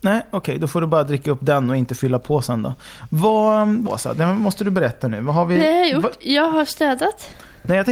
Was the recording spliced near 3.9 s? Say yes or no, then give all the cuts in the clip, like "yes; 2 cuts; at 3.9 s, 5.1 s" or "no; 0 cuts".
yes; 1 cut; at 3.9 s